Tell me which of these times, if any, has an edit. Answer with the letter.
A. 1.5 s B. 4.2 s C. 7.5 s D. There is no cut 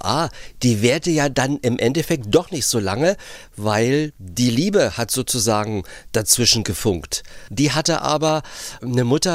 C